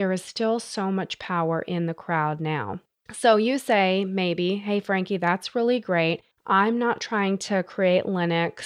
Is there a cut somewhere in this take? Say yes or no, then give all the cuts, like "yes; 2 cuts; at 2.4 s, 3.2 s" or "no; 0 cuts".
no; 0 cuts